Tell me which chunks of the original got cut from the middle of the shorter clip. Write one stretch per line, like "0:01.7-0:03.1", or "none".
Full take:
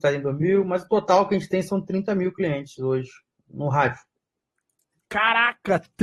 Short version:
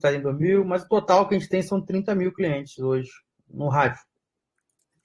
none